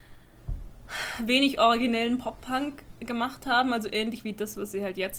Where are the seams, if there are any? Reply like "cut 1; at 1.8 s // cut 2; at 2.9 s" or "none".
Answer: none

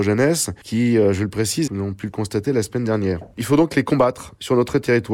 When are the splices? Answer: cut 1; at 1.7 s

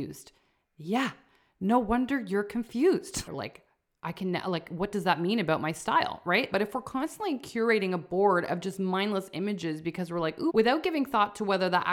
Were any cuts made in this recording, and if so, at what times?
cut 1; at 3.3 s // cut 2; at 6.5 s // cut 3; at 10.5 s

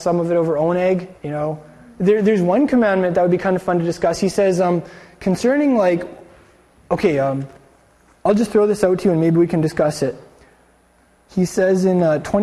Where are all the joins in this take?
cut 1; at 1.2 s

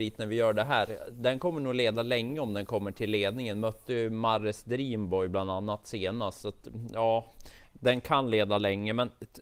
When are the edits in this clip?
none

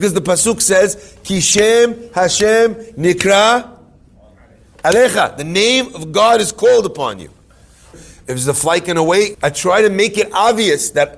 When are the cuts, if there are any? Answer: cut 1; at 7.9 s // cut 2; at 9.3 s

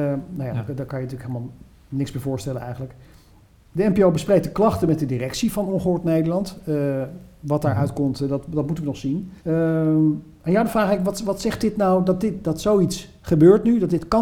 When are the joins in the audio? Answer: cut 1; at 9.4 s

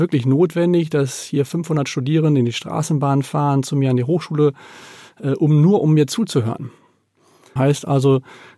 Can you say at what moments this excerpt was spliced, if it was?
cut 1; at 7.6 s

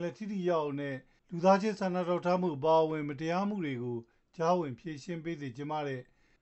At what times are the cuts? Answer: none

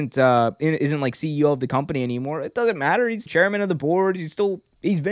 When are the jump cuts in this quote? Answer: cut 1; at 3.3 s

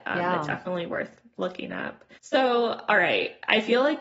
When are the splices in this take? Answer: cut 1; at 2.1 s

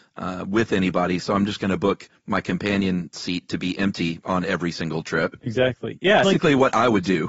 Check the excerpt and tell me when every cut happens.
cut 1; at 6.2 s

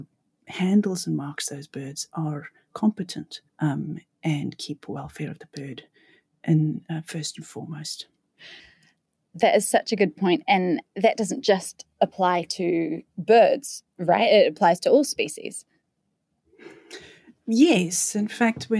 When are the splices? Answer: cut 1; at 3.5 s

